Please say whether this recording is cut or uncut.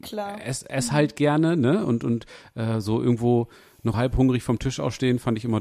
cut